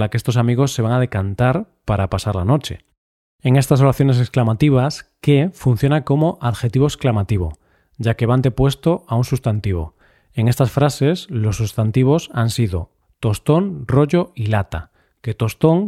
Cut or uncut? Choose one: uncut